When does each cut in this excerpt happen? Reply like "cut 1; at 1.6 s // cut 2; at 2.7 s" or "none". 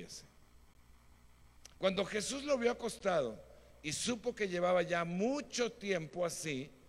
cut 1; at 1.7 s